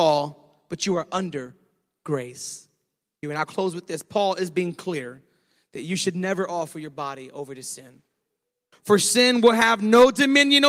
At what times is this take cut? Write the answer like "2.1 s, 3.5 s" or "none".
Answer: 3.2 s, 8.7 s